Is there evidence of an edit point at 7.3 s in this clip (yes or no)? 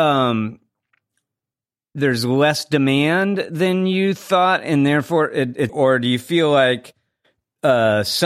no